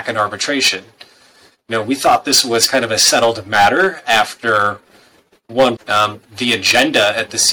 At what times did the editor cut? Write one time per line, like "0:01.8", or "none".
0:05.8